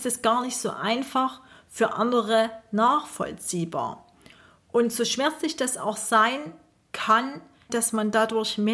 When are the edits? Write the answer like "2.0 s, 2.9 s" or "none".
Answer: 7.7 s